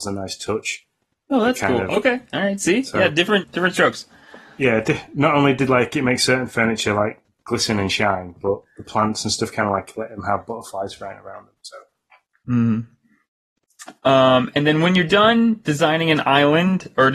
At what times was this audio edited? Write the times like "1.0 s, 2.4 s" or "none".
3.4 s

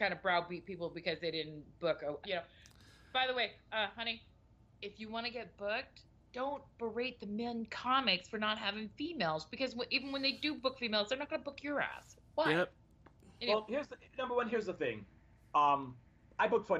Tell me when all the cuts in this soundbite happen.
2.2 s

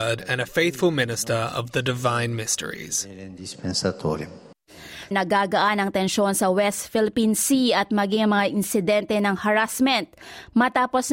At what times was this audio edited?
5.1 s

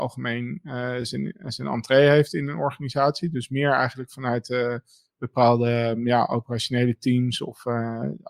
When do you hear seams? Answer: none

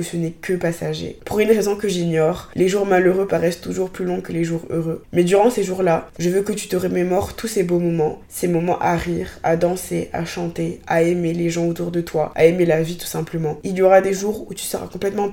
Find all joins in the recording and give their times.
6.1 s, 13.6 s

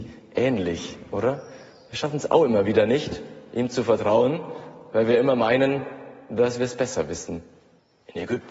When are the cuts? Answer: none

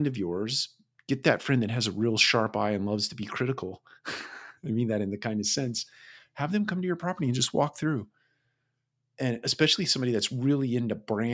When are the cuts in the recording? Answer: none

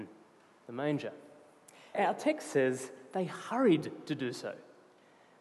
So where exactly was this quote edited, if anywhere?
1.9 s

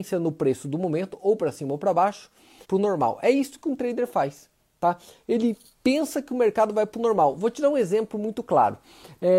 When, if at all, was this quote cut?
2.6 s

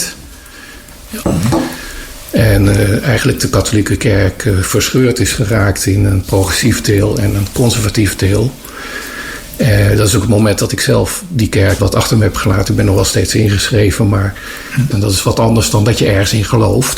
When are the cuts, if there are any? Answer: 1.2 s, 11.8 s, 14.9 s

